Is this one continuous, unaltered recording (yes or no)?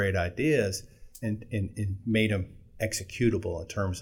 no